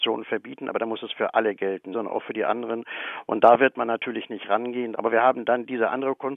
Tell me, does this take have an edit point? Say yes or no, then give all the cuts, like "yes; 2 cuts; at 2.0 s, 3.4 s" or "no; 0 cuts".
yes; 2 cuts; at 1.9 s, 4.9 s